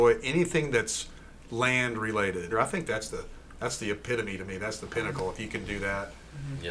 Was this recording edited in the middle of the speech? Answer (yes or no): yes